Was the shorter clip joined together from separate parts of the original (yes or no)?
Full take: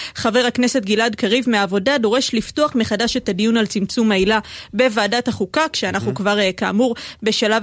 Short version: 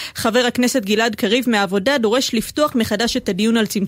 no